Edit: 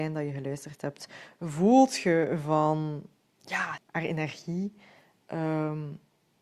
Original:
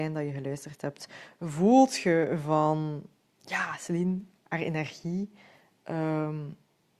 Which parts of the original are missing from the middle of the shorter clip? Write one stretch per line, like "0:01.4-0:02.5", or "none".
0:03.8-0:04.3